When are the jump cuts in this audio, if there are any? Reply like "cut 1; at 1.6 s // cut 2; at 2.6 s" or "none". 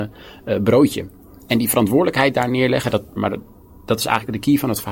cut 1; at 3.2 s

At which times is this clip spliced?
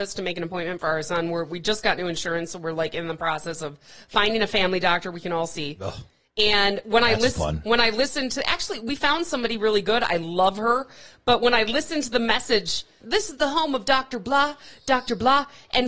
cut 1; at 13.0 s

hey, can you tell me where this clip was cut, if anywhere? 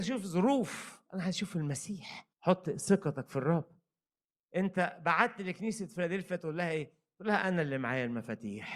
cut 1; at 2.3 s

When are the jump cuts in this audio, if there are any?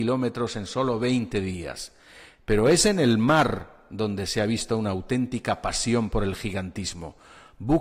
none

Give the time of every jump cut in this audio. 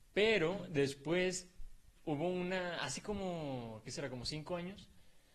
none

